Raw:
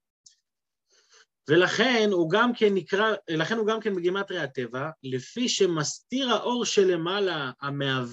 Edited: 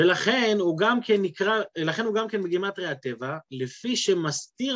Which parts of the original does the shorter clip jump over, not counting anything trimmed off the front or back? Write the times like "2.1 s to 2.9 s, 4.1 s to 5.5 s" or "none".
none